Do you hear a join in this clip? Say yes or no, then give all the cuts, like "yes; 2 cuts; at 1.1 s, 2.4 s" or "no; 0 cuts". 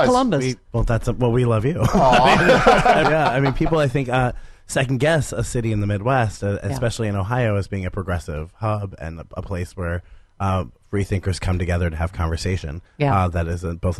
yes; 1 cut; at 3.0 s